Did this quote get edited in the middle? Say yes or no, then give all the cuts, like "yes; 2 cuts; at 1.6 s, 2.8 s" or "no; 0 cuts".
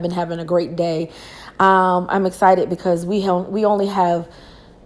no; 0 cuts